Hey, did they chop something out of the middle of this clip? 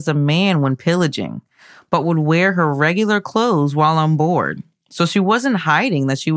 no; 0 cuts

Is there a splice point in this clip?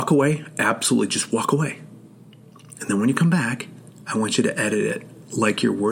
no; 0 cuts

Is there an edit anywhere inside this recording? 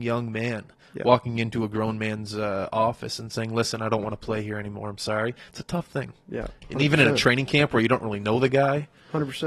no; 0 cuts

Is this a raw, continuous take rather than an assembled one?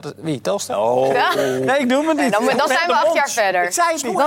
yes; 0 cuts

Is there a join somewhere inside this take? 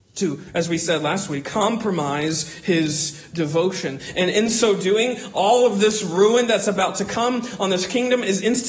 no; 0 cuts

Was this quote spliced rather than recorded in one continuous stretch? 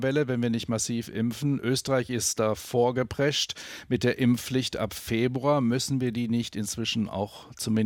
no; 0 cuts

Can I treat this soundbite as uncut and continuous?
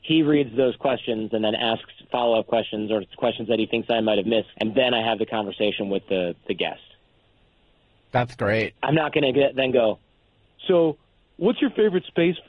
no; 2 cuts; at 4.5 s, 8.8 s

